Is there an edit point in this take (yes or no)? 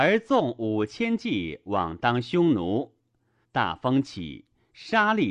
yes